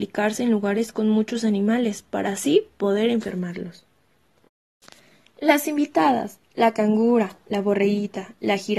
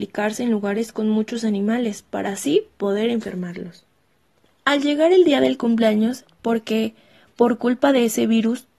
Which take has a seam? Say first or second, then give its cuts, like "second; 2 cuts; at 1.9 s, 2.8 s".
second; 2 cuts; at 4.4 s, 6.4 s